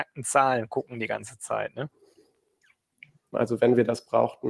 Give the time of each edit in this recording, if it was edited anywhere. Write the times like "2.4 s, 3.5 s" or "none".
3.3 s